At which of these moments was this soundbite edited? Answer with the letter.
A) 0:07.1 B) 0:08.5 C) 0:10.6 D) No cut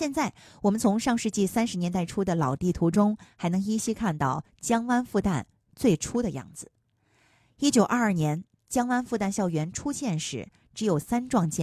D